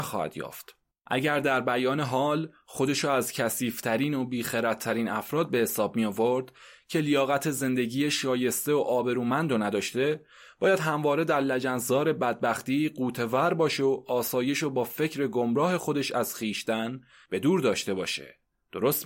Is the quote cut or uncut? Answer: cut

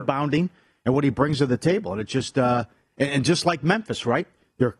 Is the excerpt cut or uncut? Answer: uncut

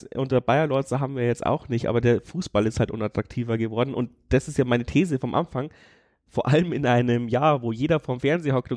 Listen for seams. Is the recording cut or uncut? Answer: uncut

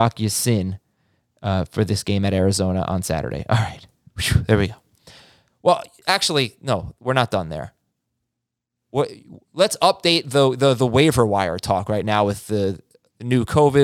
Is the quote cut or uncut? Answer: uncut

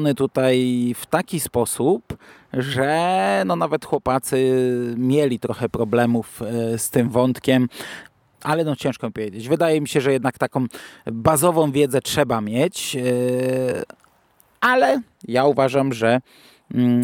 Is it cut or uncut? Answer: uncut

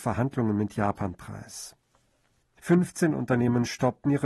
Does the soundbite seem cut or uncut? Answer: cut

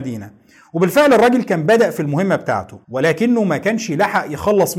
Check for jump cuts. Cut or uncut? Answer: cut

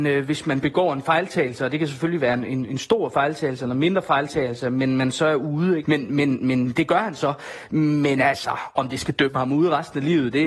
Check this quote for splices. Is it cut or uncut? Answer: cut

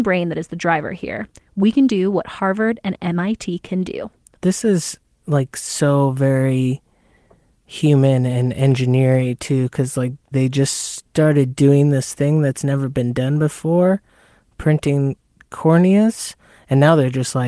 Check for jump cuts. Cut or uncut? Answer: cut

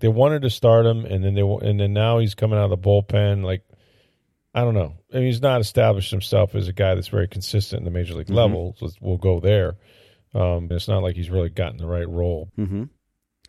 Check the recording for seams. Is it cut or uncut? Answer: cut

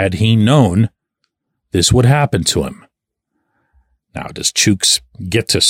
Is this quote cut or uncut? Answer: uncut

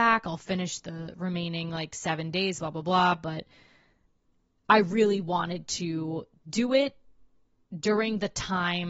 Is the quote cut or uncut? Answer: uncut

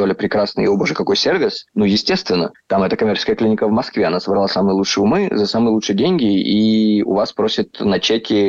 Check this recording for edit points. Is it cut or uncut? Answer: cut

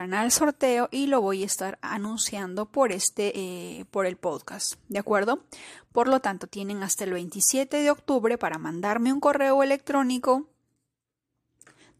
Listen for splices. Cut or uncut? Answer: uncut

